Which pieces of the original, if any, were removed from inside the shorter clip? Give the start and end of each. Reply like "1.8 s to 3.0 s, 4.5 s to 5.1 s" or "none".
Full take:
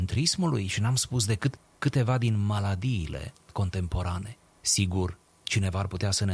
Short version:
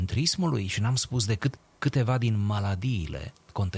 none